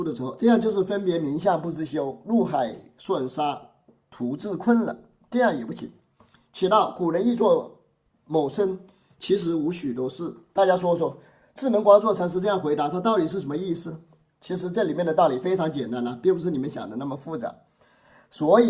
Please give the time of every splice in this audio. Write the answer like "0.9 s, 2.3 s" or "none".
none

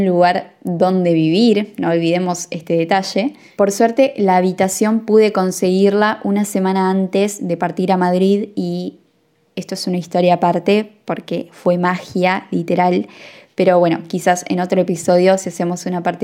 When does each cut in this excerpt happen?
none

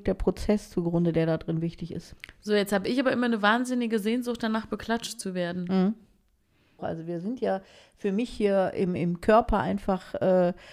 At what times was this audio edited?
6.8 s, 9.0 s

